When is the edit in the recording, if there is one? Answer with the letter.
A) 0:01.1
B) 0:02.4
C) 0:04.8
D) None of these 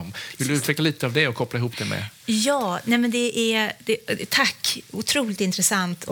D